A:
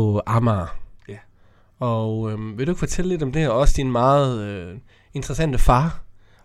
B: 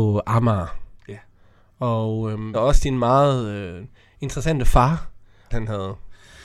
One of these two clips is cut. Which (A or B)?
B